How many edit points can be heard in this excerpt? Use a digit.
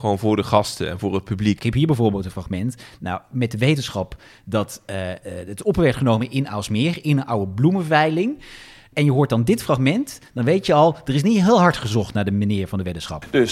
1